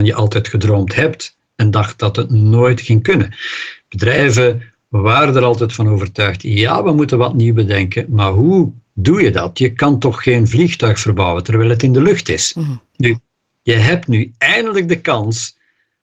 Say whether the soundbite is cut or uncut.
uncut